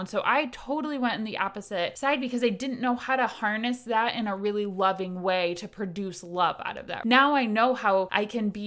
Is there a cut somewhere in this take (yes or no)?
no